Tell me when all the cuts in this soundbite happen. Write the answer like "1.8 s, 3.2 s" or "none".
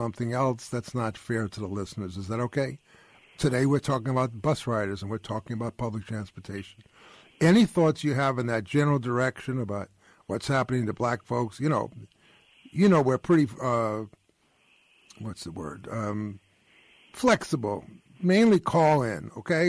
none